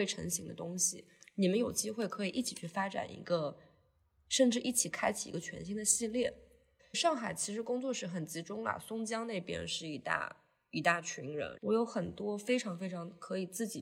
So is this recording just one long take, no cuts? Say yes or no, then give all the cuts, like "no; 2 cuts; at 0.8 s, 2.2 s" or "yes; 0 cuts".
no; 2 cuts; at 6.8 s, 11.6 s